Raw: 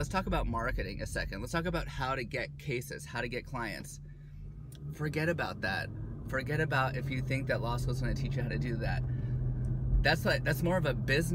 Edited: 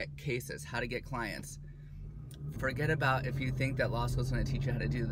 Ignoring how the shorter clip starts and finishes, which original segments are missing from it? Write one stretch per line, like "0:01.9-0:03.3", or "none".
0:04.9-0:06.2